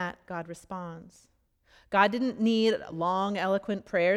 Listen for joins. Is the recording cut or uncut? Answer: uncut